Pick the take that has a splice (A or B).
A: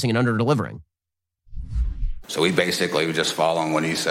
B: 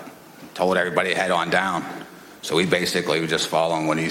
A